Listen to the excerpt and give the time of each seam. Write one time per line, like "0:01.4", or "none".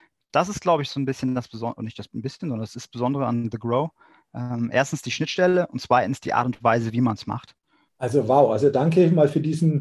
0:07.9